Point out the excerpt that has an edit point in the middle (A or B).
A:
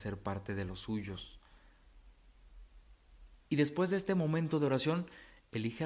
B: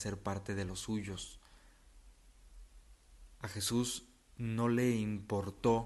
A